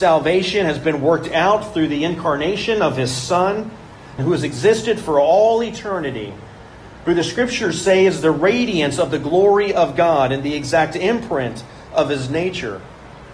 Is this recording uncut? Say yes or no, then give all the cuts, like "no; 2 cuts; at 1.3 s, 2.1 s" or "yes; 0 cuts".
no; 1 cut; at 4.2 s